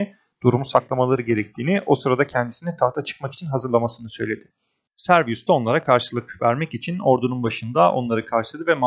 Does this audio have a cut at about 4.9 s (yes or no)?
yes